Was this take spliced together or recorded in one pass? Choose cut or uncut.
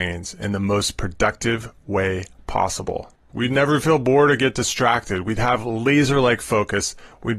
cut